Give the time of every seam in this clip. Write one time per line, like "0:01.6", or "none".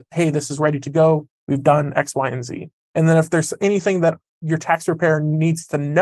0:01.4